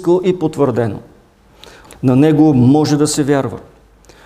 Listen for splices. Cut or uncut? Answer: cut